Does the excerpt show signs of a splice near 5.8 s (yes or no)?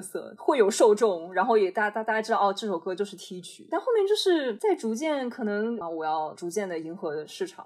yes